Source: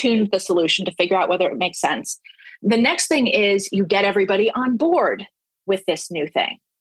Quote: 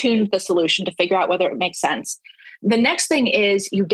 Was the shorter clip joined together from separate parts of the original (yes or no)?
no